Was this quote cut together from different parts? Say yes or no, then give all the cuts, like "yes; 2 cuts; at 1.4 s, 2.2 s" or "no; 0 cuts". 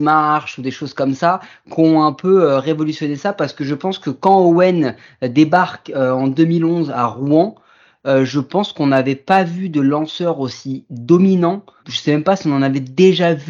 yes; 1 cut; at 11.8 s